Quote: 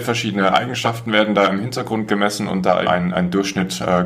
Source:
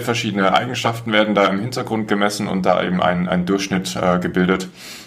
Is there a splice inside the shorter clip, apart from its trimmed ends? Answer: yes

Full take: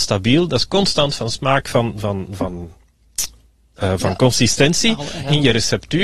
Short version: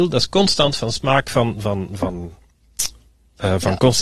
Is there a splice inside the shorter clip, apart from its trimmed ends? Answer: no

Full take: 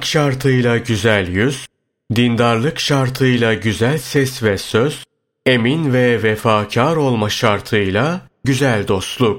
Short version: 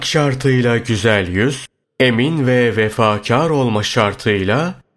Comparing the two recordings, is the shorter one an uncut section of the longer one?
no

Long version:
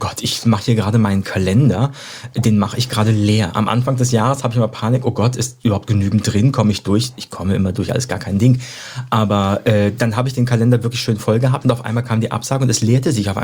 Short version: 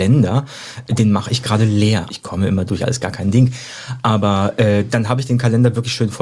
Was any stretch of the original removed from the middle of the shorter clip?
yes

